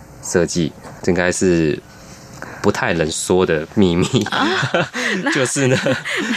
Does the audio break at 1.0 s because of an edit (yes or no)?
yes